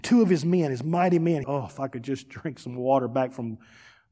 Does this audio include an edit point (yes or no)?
yes